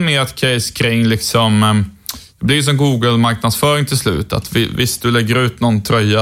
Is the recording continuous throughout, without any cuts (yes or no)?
yes